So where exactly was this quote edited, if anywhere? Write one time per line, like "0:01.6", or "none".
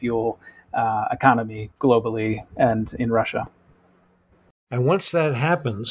0:04.7